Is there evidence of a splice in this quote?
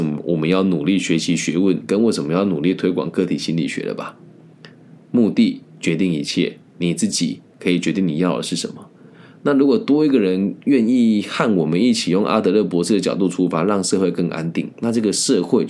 no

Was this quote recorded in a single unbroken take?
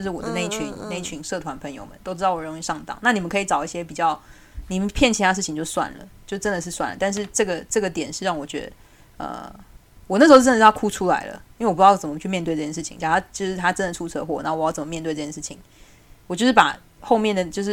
yes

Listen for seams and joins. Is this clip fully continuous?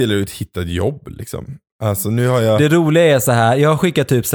yes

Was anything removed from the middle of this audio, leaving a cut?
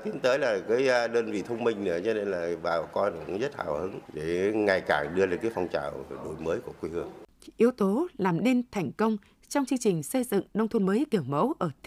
no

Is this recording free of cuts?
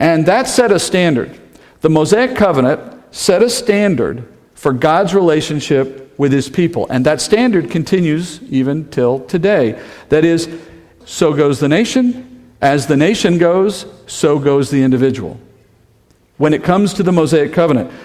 no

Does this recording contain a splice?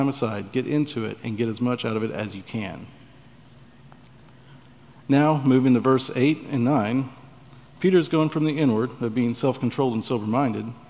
no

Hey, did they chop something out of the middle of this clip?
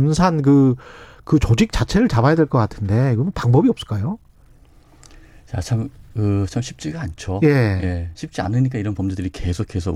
no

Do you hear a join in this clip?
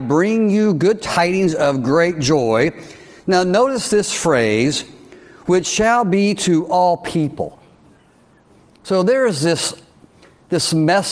no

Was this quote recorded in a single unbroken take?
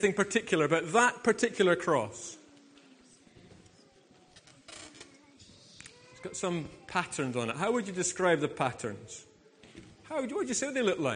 yes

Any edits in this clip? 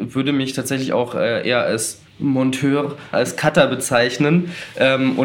yes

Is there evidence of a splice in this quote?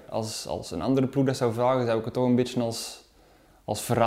no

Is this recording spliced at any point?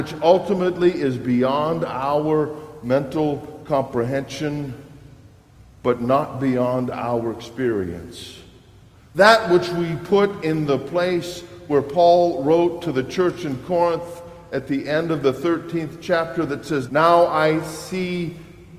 yes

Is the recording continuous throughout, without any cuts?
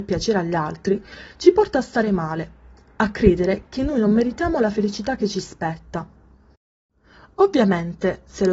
yes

